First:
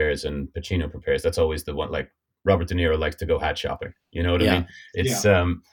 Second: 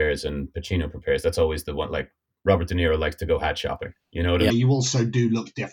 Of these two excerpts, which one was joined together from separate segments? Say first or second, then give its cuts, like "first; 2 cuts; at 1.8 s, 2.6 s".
second; 1 cut; at 4.5 s